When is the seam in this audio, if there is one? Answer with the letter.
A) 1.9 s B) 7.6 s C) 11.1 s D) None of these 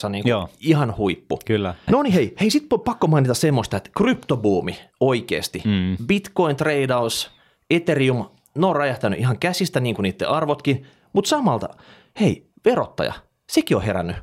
A